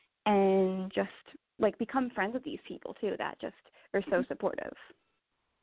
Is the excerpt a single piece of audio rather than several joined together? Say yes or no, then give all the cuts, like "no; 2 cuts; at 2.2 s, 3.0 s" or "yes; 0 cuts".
yes; 0 cuts